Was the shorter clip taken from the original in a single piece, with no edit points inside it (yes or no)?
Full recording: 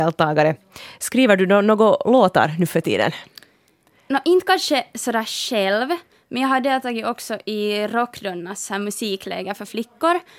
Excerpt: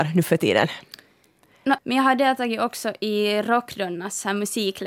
no